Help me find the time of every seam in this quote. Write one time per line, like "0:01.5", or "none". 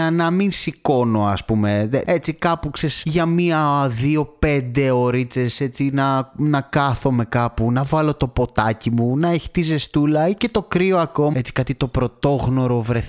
0:02.1
0:11.3